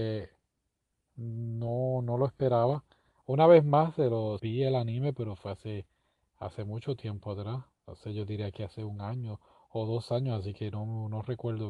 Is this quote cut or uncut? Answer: cut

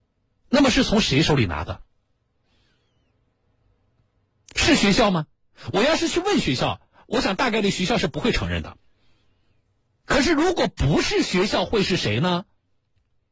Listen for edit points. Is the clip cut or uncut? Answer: uncut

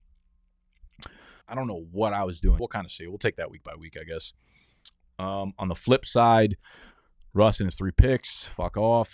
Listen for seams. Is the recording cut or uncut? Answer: cut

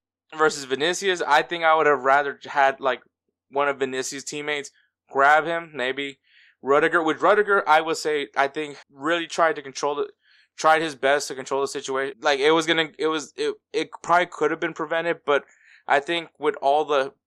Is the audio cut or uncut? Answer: cut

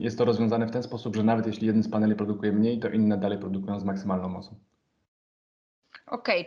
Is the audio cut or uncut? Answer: uncut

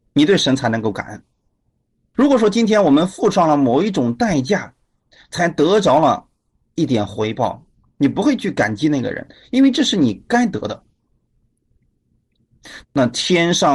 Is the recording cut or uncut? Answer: cut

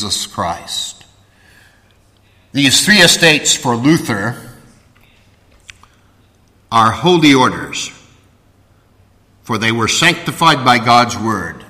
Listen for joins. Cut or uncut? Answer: uncut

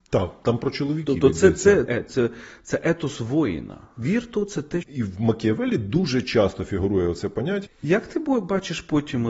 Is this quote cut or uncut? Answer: cut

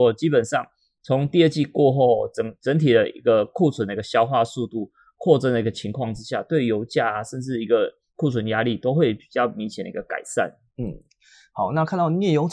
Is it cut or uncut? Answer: uncut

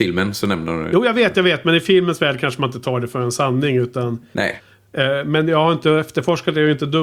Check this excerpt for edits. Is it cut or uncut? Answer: uncut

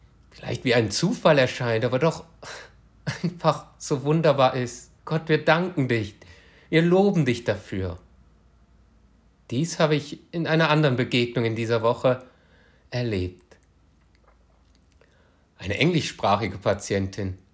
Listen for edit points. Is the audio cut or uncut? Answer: cut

